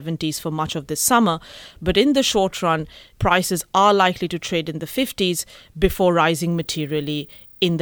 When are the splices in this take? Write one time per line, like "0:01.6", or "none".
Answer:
0:03.1